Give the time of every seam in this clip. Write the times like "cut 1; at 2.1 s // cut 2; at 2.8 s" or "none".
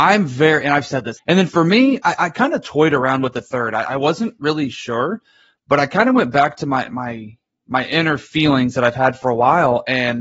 cut 1; at 1.2 s